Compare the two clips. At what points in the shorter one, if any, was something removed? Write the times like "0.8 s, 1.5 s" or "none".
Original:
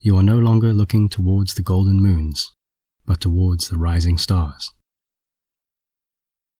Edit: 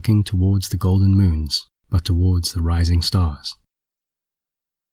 1.8 s